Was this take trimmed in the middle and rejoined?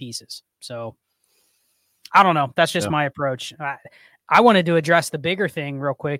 no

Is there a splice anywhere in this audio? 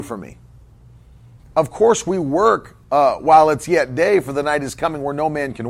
yes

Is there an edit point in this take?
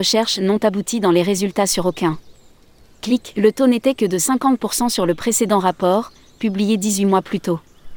no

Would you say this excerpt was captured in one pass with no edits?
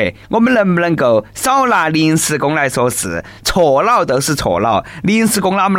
yes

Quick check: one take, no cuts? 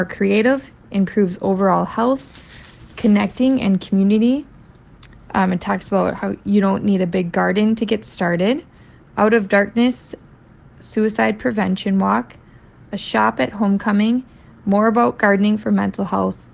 no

